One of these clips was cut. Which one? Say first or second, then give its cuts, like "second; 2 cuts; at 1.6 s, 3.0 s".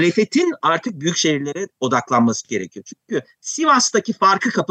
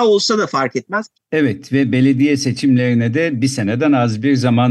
second; 1 cut; at 1.1 s